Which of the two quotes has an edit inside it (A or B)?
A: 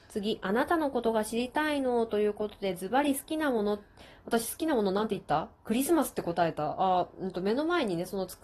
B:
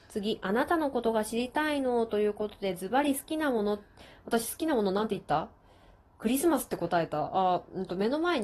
A